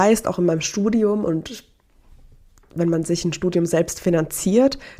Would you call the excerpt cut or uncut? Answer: uncut